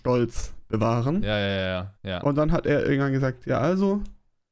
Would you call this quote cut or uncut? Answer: cut